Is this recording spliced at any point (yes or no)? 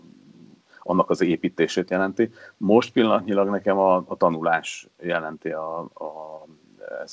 no